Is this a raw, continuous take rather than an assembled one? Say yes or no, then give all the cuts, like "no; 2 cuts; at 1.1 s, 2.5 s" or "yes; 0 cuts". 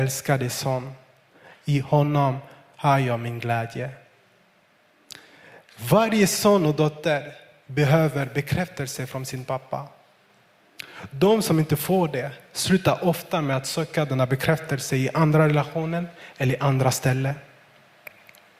yes; 0 cuts